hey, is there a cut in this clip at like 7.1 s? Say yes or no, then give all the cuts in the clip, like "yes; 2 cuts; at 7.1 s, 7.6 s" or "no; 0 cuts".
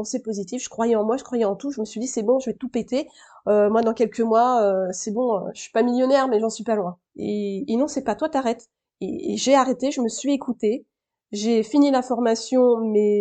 yes; 1 cut; at 7.1 s